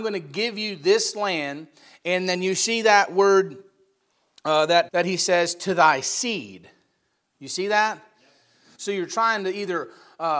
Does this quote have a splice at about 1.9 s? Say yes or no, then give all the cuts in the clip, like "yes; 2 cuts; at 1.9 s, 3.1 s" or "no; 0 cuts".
no; 2 cuts; at 4.9 s, 8.8 s